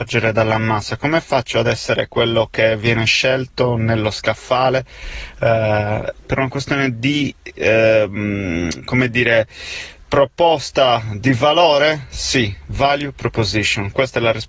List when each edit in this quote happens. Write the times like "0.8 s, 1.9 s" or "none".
none